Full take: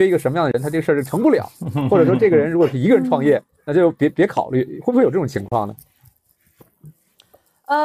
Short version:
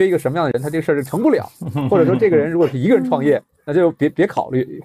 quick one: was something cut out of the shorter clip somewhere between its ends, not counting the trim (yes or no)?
no